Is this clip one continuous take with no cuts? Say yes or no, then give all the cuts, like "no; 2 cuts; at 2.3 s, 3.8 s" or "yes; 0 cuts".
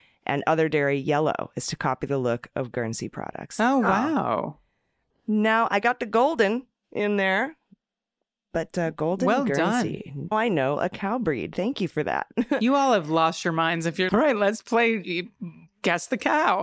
no; 3 cuts; at 5.1 s, 10.3 s, 14.1 s